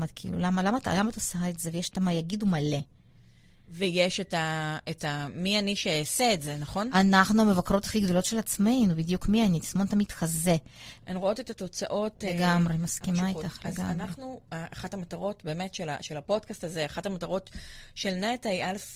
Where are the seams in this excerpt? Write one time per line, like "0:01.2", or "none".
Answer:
0:11.0